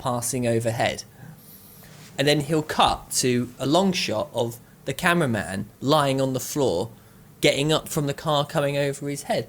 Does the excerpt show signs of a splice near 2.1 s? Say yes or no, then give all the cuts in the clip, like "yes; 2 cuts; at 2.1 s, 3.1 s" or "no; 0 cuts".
no; 0 cuts